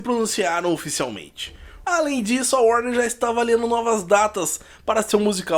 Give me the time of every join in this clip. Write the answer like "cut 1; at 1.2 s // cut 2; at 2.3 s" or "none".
cut 1; at 1.8 s

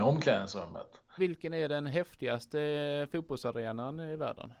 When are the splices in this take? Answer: cut 1; at 1.2 s

